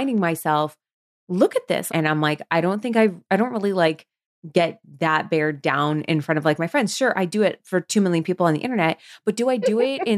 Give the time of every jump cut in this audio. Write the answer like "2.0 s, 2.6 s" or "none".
1.9 s